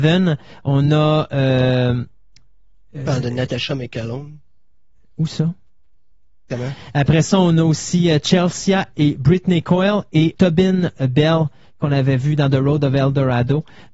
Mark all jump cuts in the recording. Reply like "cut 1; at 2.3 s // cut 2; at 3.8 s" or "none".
cut 1; at 6.5 s // cut 2; at 10.3 s